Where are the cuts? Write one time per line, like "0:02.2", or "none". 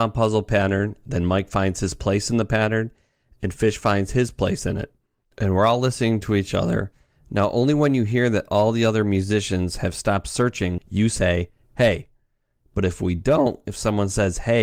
0:10.8
0:12.6